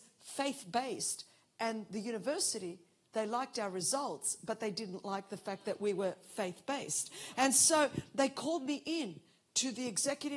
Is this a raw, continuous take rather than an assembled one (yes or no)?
yes